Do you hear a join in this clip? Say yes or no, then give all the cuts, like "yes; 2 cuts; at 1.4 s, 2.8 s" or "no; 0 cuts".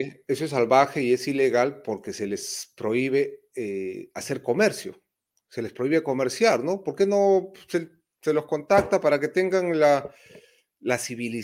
no; 0 cuts